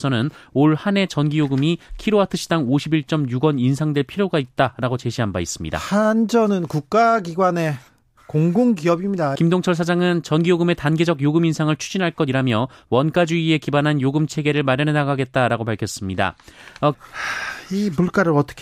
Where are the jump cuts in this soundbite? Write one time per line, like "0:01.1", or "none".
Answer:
0:09.4
0:16.9